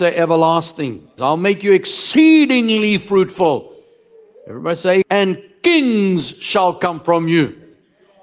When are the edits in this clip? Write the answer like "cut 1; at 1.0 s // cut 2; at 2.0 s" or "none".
cut 1; at 1.2 s // cut 2; at 5.0 s